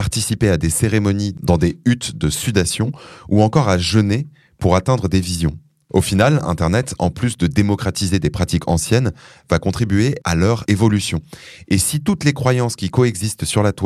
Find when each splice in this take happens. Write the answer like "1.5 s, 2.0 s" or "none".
none